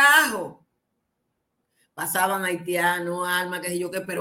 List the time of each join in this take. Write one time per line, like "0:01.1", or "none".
none